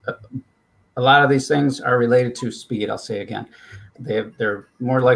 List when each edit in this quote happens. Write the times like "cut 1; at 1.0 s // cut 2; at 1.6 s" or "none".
cut 1; at 4.0 s